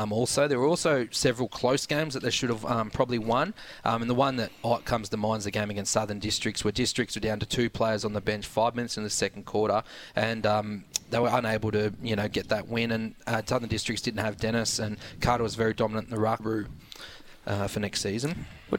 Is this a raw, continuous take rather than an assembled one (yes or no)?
no